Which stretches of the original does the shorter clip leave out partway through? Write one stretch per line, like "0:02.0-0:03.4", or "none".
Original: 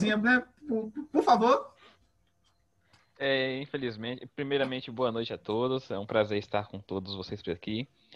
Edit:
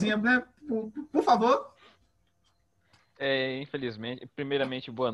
none

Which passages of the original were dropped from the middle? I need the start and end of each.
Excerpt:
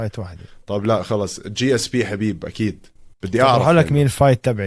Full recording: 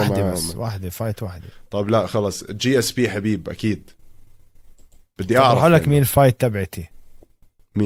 0:04.2-0:05.1

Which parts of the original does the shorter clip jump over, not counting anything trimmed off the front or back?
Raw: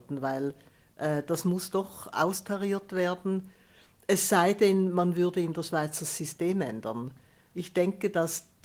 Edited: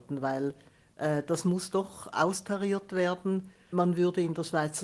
0:03.7-0:04.9

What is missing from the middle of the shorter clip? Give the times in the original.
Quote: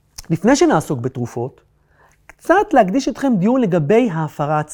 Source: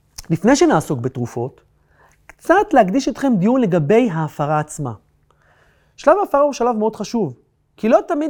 none

